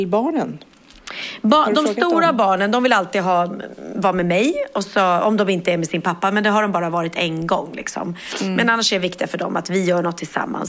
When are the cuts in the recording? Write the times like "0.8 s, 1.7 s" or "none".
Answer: none